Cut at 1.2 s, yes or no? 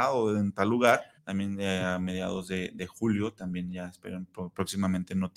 yes